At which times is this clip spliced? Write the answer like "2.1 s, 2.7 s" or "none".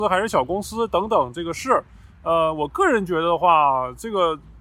none